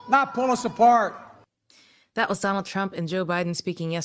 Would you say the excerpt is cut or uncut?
uncut